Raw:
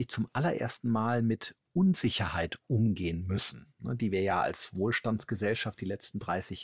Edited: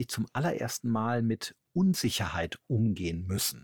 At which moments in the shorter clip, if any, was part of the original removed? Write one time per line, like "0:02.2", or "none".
none